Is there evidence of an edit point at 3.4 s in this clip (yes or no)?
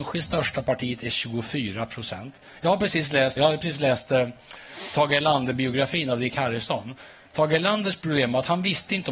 yes